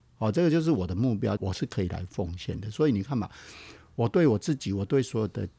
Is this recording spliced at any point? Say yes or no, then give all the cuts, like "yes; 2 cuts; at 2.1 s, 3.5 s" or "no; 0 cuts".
yes; 1 cut; at 1.4 s